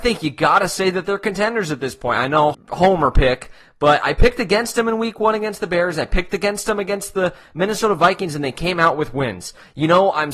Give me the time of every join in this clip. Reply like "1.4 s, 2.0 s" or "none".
2.5 s